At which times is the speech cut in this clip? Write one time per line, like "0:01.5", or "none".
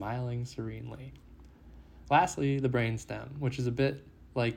none